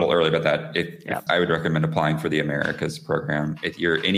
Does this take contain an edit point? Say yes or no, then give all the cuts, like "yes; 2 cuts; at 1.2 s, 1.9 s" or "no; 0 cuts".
yes; 1 cut; at 1.3 s